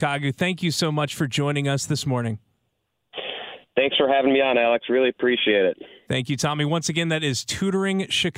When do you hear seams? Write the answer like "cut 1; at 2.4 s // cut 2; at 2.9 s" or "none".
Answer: none